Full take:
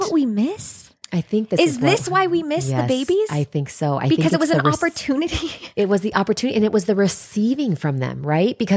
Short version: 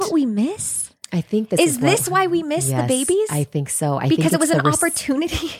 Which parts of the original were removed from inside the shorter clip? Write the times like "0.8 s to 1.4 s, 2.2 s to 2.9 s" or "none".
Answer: none